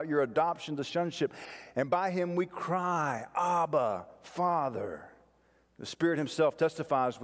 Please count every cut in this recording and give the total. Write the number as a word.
zero